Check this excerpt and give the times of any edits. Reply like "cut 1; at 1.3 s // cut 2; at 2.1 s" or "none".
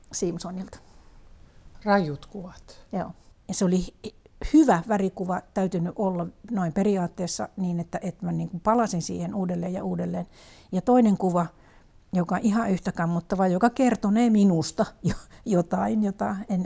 cut 1; at 3.3 s

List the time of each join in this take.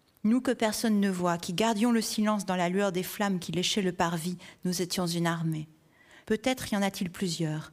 cut 1; at 6.2 s

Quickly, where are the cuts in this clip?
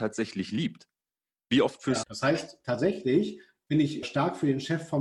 cut 1; at 2.0 s // cut 2; at 4.0 s

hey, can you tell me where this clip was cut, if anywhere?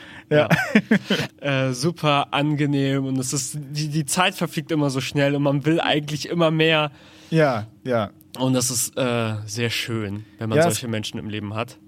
cut 1; at 1.3 s

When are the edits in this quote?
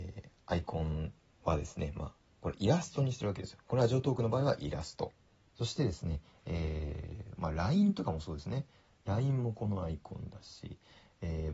cut 1; at 5.4 s // cut 2; at 7.4 s

